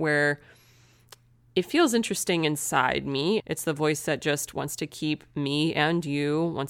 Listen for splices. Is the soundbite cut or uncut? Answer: cut